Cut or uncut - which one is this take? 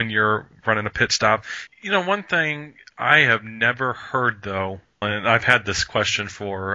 cut